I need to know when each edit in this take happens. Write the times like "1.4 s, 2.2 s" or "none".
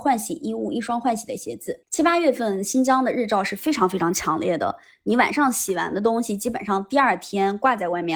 1.8 s